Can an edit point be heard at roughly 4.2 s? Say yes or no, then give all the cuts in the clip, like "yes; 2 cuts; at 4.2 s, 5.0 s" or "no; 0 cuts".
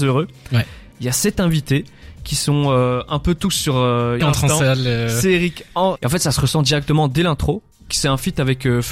yes; 2 cuts; at 4.2 s, 6.0 s